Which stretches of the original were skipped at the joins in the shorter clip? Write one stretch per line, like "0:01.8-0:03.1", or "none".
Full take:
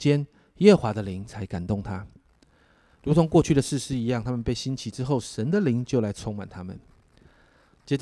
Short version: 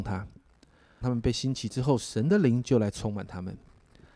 0:02.8-0:04.2

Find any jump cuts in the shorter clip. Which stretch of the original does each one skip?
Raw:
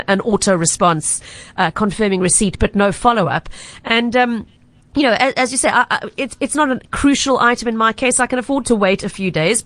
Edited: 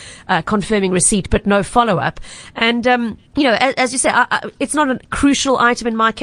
0:04.6-0:04.9
0:06.1-0:06.4

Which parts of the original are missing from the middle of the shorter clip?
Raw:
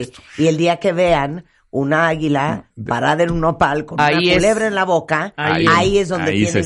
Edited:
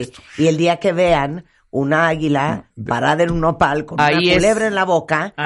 none

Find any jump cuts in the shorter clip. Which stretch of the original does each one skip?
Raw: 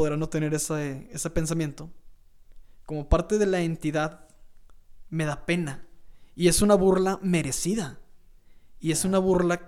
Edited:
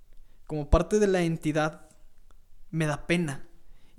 none

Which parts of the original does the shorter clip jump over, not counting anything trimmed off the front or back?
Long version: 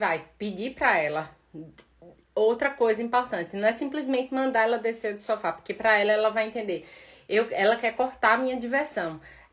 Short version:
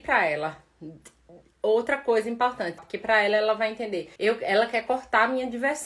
0:03.5-0:05.5
0:06.9-0:07.3

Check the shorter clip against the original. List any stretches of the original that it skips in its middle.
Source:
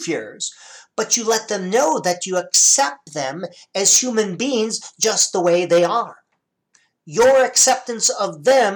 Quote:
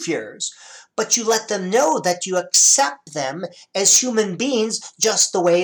none

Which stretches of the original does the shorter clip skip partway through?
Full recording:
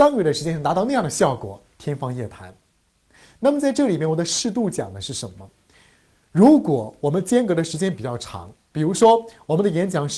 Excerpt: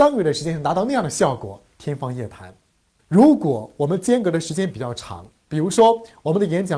0:03.0-0:06.2

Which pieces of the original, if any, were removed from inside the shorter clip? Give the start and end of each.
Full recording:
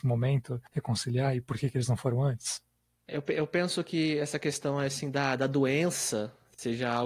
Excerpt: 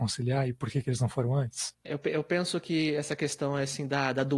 0:02.6-0:03.0

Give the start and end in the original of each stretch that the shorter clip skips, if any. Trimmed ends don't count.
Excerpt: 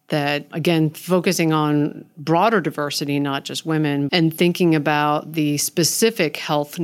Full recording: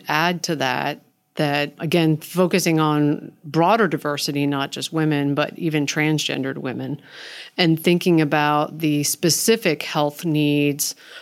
0:05.4-0:07.5

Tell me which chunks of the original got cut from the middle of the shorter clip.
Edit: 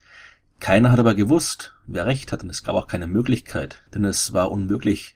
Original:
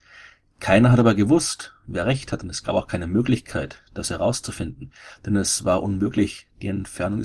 0:03.9-0:05.2

